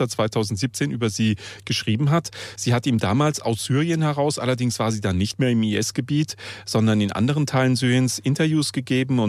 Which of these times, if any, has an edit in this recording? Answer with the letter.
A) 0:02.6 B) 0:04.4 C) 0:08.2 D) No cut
D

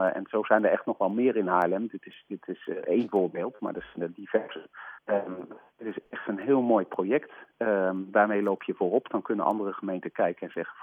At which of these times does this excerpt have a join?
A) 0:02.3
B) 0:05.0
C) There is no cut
B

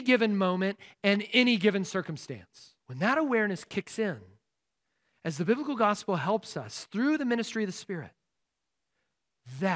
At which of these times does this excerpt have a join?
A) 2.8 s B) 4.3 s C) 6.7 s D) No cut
A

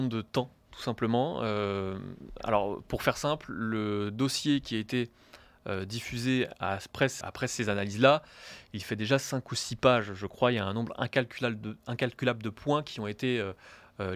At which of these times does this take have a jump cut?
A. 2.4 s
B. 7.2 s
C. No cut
B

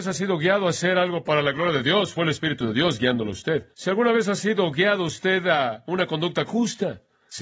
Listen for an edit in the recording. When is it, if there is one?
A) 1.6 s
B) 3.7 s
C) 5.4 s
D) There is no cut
B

